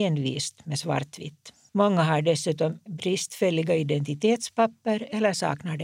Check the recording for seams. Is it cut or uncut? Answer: cut